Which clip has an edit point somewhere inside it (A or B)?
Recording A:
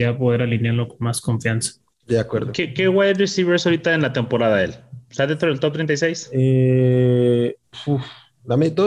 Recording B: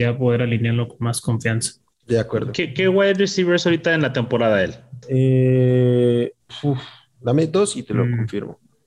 B